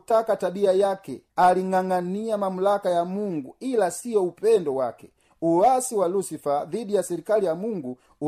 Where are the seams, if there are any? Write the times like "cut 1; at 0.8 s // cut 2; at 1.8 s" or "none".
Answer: cut 1; at 1.3 s